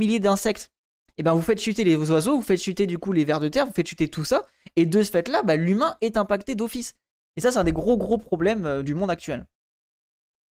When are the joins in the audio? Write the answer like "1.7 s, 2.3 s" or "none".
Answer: 7.2 s, 8.8 s